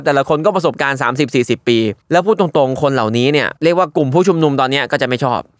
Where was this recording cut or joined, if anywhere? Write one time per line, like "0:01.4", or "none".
0:02.0
0:03.6